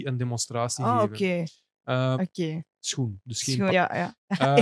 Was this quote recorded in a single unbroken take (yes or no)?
no